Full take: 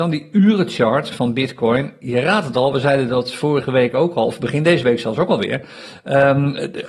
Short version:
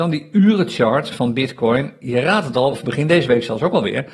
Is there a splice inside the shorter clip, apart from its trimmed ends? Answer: yes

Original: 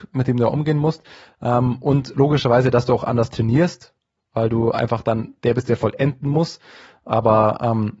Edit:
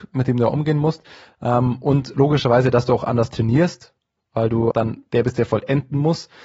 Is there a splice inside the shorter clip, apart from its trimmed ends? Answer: yes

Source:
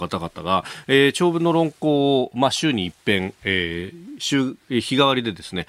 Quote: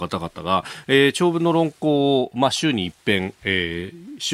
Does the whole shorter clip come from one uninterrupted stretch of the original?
yes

